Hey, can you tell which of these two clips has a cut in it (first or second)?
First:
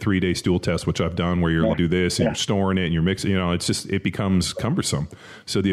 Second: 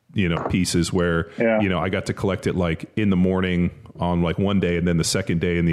first